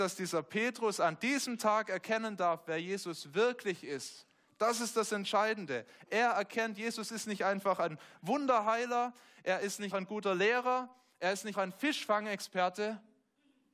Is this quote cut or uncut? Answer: cut